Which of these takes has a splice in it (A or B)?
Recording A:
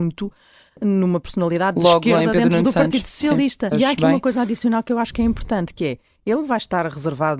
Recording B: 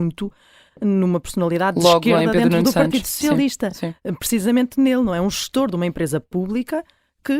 A